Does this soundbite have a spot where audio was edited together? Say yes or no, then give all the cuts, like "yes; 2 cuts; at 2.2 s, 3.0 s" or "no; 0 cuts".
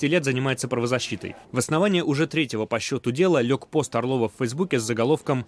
yes; 1 cut; at 1.4 s